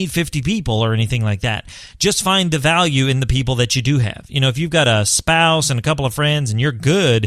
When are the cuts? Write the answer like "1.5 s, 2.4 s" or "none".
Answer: none